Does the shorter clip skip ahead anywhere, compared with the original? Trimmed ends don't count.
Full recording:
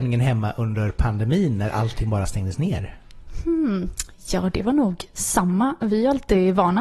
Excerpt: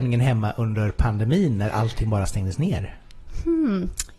no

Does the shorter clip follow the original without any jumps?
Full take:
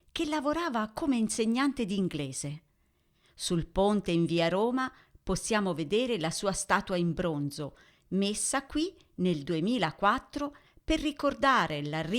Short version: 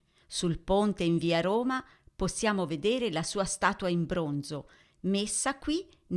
yes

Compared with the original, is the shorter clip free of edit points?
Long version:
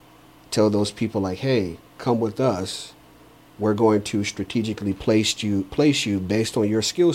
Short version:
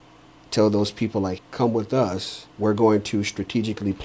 no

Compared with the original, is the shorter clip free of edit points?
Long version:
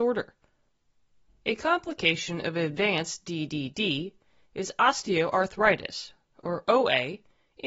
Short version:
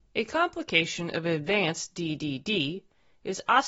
yes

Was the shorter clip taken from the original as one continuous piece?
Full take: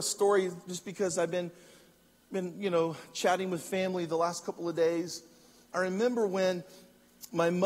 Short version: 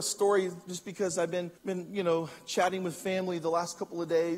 no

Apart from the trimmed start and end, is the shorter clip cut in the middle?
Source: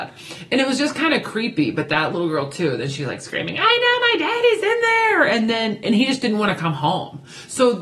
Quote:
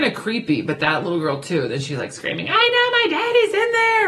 no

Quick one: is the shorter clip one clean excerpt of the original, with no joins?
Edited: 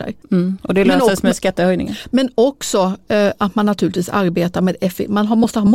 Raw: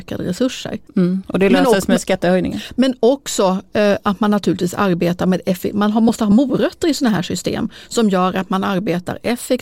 yes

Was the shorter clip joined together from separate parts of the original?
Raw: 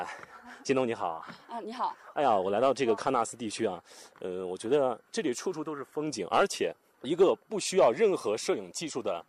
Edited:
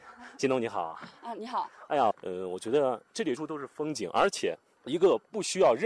yes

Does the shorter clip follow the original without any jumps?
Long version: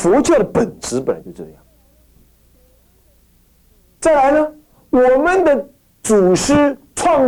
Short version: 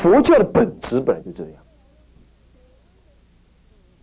yes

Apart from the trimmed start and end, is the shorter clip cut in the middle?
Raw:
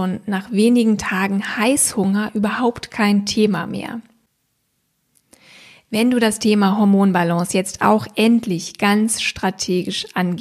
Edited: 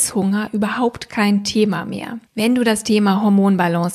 yes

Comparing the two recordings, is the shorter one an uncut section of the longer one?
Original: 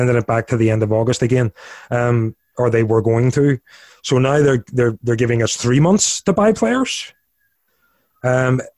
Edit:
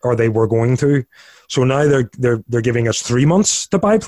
yes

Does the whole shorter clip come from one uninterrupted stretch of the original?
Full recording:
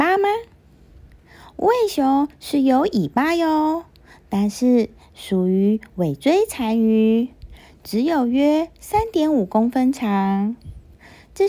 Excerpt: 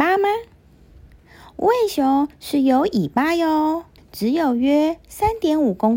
no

